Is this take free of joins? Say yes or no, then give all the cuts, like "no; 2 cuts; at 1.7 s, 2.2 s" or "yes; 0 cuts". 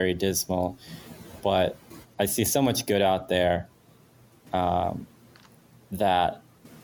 no; 1 cut; at 2.0 s